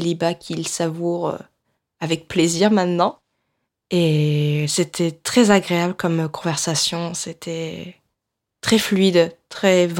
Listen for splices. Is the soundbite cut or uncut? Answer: uncut